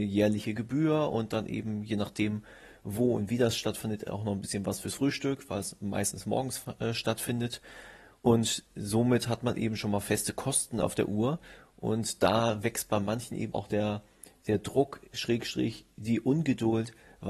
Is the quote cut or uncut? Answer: cut